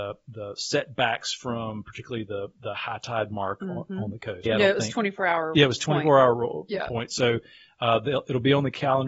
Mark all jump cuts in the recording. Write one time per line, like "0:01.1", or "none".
0:04.5